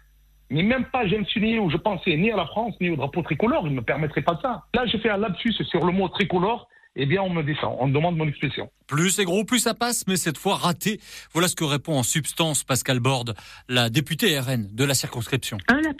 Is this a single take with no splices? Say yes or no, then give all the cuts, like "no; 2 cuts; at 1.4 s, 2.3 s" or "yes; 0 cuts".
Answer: yes; 0 cuts